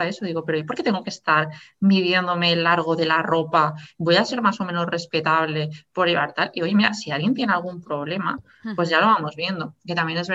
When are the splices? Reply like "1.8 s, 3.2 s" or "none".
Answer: none